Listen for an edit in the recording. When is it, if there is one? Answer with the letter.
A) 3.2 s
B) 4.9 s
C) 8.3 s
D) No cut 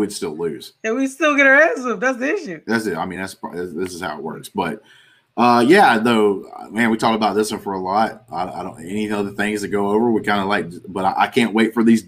D